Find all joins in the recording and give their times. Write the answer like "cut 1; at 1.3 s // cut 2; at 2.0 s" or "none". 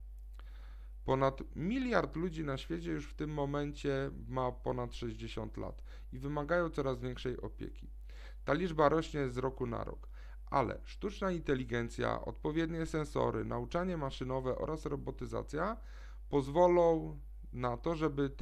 none